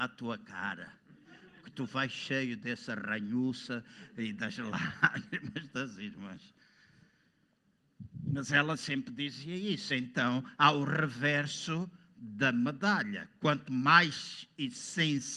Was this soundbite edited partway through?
no; 0 cuts

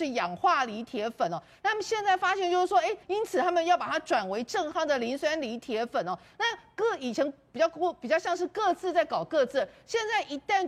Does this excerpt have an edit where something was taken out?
yes; 1 cut; at 3.0 s

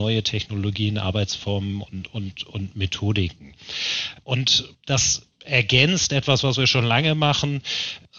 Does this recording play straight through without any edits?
yes; 0 cuts

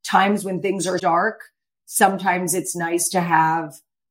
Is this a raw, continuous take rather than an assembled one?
no; 1 cut; at 1.0 s

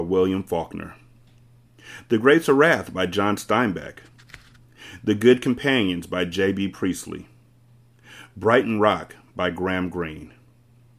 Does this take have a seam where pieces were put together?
no; 0 cuts

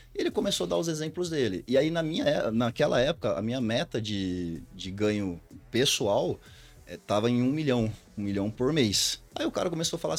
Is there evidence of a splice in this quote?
no; 0 cuts

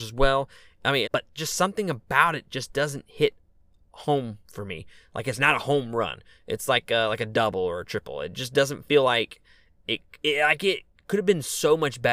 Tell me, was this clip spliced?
yes; 1 cut; at 1.0 s

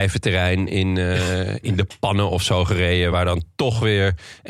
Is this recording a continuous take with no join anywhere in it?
yes; 0 cuts

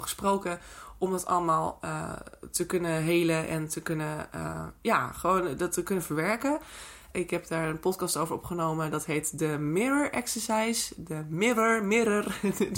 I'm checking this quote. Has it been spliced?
yes; 1 cut; at 7.1 s

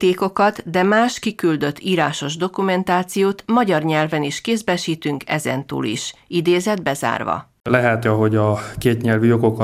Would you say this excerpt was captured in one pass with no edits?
no; 1 cut; at 8.1 s

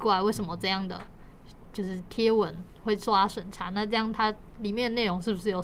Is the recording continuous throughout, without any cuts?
yes; 0 cuts

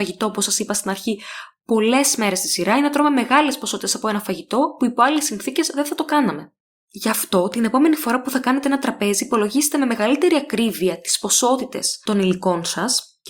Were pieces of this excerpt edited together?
no; 0 cuts

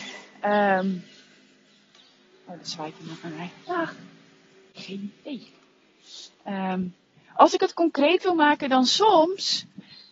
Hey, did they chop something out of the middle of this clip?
no; 0 cuts

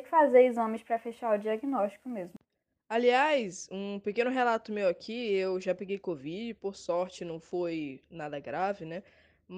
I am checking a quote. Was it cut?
no; 0 cuts

